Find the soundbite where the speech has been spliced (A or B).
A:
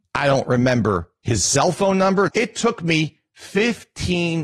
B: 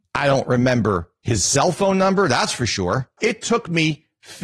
A